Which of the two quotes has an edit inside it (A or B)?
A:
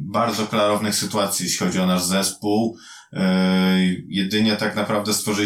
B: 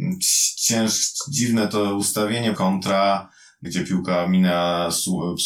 B